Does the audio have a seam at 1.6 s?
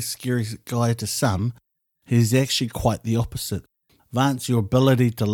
no; 1 cut; at 4.0 s

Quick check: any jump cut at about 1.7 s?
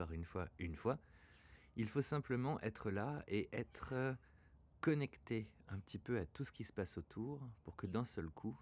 no; 0 cuts

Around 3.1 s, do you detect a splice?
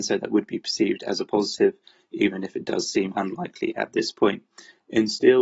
yes; 1 cut; at 3.1 s

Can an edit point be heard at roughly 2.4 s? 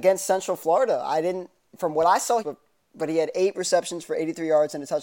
yes; 1 cut; at 2.4 s

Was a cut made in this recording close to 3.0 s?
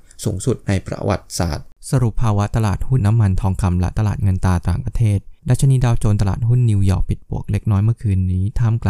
yes; 2 cuts; at 3.0 s, 5.4 s

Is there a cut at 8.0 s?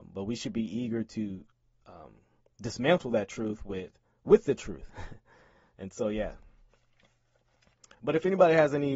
no; 0 cuts

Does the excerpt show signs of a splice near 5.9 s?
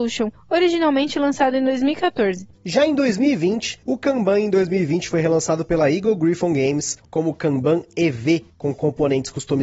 no; 2 cuts; at 2.5 s, 3.8 s

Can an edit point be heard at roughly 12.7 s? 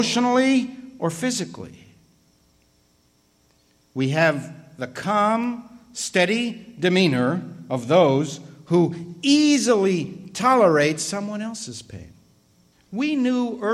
yes; 1 cut; at 12.7 s

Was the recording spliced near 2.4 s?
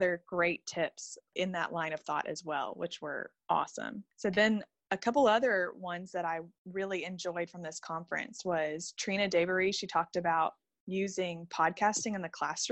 no; 0 cuts

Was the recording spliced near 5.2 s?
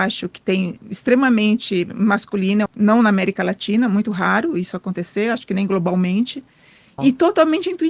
no; 2 cuts; at 2.7 s, 7.0 s

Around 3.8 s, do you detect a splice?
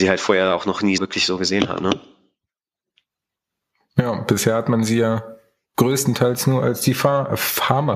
no; 1 cut; at 1.0 s

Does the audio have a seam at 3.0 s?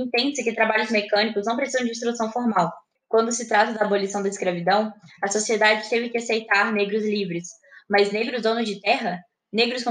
yes; 1 cut; at 3.0 s

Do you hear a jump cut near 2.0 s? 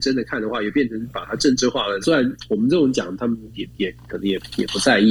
yes; 1 cut; at 2.0 s

